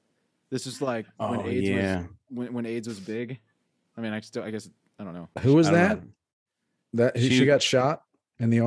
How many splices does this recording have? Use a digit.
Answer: 1